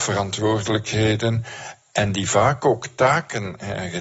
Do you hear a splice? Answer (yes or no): no